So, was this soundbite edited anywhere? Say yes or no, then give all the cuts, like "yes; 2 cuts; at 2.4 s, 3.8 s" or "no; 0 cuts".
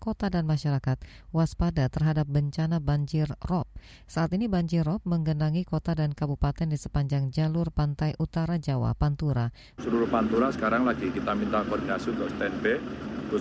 yes; 1 cut; at 9.8 s